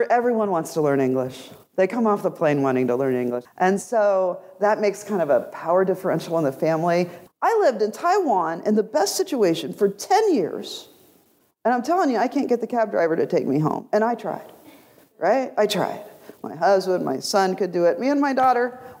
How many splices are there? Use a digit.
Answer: 2